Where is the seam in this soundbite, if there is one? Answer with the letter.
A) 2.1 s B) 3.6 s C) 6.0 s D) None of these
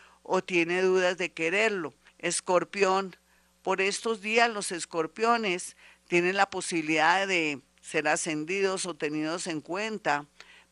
A